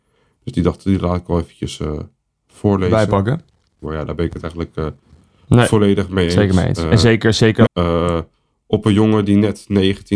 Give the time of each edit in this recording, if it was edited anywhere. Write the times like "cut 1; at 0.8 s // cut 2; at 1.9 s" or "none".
cut 1; at 3.8 s // cut 2; at 7.7 s